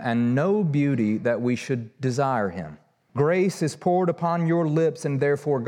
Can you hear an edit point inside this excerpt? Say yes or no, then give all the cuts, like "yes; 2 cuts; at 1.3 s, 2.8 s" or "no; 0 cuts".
yes; 1 cut; at 3.1 s